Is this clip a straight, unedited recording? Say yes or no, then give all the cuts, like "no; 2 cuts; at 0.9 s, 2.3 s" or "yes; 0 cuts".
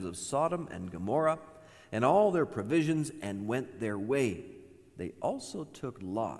yes; 0 cuts